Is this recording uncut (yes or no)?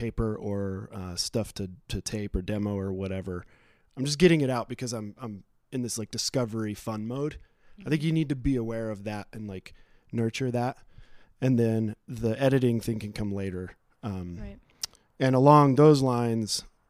yes